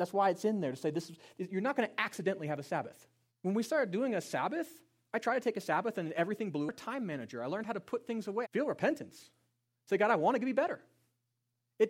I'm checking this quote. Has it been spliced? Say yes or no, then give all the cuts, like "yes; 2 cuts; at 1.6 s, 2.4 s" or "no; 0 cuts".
yes; 2 cuts; at 3.3 s, 8.4 s